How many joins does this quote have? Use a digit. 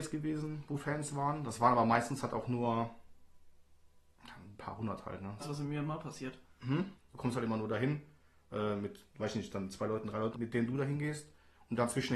3